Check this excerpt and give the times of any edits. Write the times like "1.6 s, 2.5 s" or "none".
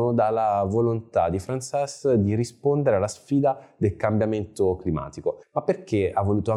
5.4 s